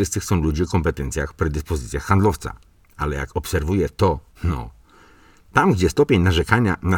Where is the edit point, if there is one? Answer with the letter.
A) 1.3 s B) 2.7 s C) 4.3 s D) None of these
C